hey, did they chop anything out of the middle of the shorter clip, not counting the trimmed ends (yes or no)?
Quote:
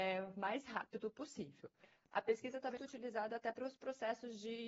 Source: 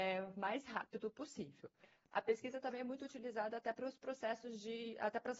yes